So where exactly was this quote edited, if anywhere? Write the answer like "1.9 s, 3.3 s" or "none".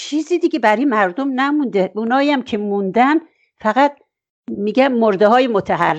none